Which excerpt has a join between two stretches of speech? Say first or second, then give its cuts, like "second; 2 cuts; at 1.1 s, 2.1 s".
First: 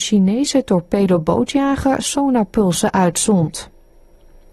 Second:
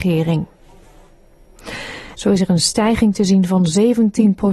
second; 1 cut; at 2.1 s